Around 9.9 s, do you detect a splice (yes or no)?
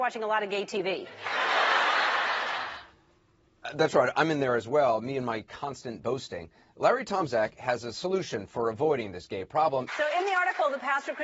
yes